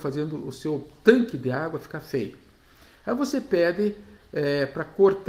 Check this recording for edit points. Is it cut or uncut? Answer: uncut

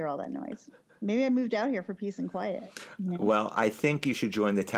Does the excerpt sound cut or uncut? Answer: uncut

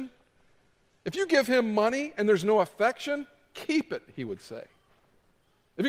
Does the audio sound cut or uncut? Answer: uncut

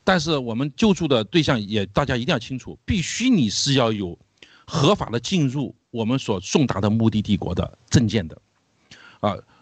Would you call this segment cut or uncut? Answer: uncut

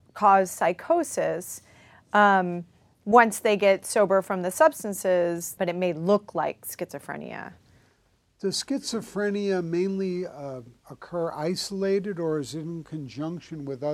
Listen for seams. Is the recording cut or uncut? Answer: cut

